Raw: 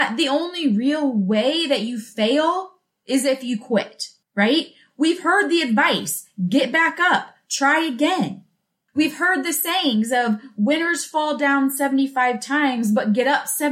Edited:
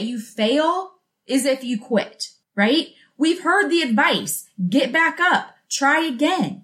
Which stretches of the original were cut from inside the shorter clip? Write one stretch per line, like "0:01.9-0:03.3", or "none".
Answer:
none